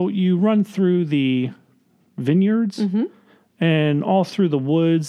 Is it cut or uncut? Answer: uncut